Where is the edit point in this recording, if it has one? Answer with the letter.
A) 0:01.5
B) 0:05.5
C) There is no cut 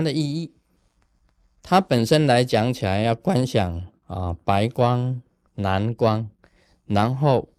B